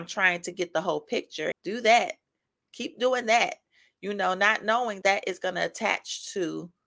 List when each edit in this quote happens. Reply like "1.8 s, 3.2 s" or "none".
1.5 s, 5.0 s